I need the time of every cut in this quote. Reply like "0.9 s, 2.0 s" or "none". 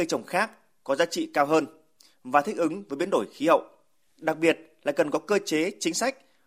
4.1 s